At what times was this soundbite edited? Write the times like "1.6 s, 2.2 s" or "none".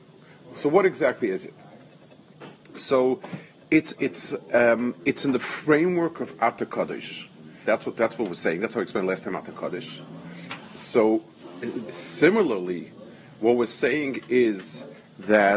4.0 s, 7.6 s